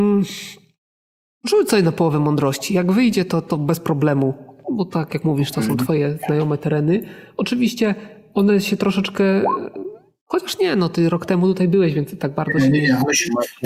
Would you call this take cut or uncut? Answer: uncut